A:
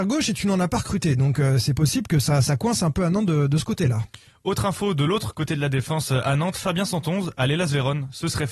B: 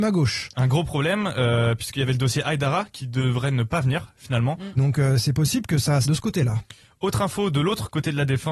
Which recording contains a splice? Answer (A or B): B